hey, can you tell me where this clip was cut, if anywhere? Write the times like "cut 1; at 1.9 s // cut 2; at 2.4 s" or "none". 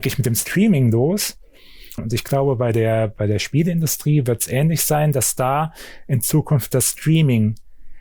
cut 1; at 2.0 s